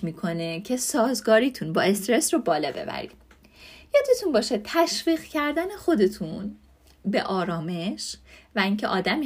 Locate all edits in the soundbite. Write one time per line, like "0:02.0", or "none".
none